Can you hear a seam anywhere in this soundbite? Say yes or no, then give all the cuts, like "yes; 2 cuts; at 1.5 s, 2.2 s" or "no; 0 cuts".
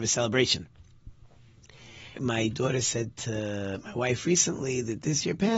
yes; 1 cut; at 2.2 s